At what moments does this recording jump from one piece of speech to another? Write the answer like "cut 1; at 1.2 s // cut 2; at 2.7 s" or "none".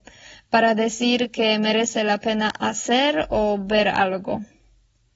none